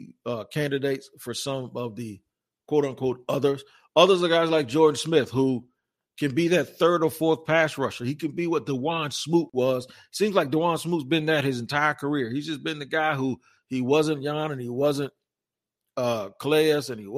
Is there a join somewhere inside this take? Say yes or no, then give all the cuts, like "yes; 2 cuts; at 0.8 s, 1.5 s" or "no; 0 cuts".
no; 0 cuts